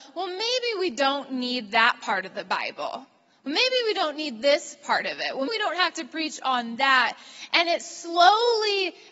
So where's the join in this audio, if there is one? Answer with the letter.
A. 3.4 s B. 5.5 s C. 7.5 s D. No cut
B